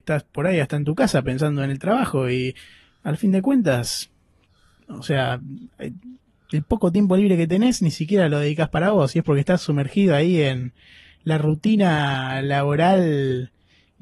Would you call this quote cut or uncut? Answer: uncut